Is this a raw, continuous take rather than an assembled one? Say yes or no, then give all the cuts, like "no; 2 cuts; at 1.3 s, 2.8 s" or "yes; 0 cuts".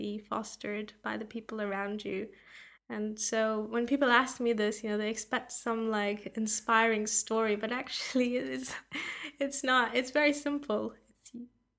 no; 1 cut; at 2.8 s